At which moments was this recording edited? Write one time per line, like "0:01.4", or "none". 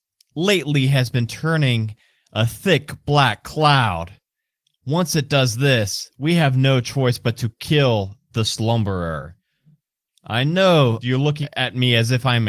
0:11.0